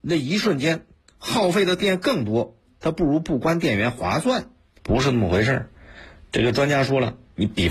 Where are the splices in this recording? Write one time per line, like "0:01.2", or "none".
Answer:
0:04.7